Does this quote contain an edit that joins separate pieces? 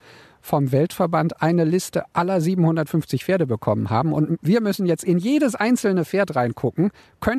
no; 0 cuts

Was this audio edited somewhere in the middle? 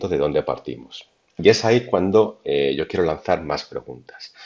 no; 0 cuts

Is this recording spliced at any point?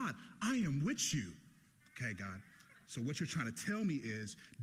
yes; 1 cut; at 1.8 s

